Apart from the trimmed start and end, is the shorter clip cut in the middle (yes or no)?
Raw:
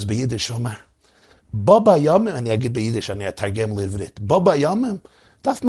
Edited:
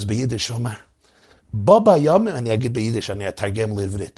no